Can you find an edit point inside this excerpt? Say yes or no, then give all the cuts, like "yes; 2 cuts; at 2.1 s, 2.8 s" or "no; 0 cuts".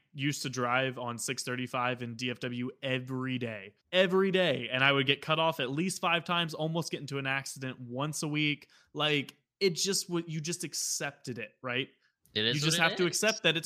yes; 1 cut; at 3.8 s